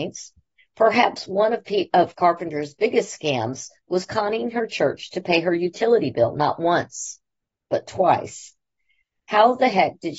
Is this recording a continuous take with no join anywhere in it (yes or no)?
yes